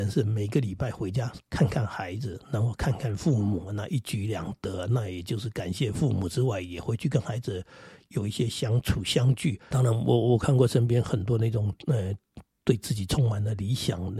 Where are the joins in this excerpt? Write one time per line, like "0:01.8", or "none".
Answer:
0:09.7

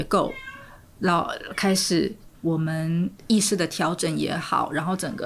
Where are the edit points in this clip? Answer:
0:02.3

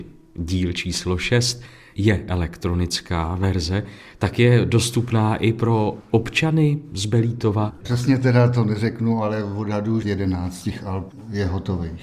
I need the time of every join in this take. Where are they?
0:07.8
0:10.0

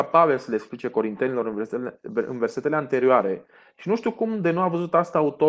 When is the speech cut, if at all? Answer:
none

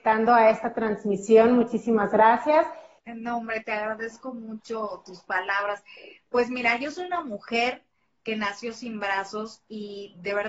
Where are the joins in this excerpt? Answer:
0:03.0

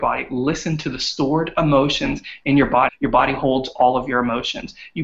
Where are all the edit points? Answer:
0:02.9

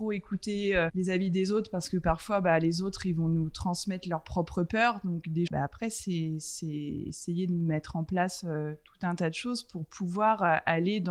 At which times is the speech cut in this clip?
0:05.5

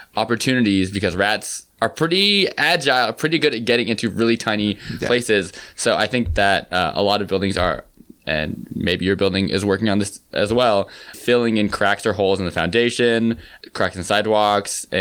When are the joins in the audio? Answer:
0:11.1

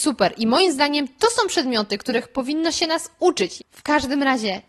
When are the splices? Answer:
0:03.6

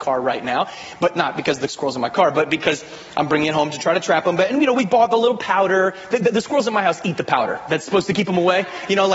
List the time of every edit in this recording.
none

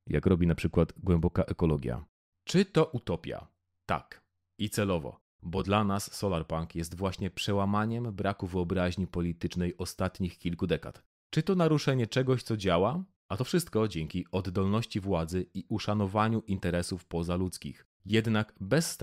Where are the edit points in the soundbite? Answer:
0:13.2

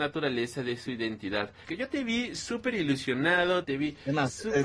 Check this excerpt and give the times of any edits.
0:01.6
0:03.6

